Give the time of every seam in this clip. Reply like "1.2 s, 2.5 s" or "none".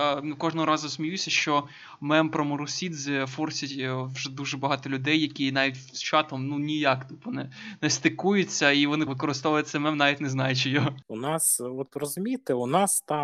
9.1 s